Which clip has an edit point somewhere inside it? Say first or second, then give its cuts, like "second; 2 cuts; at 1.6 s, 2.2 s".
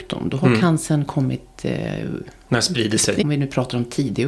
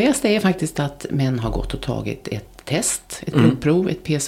first; 1 cut; at 3.2 s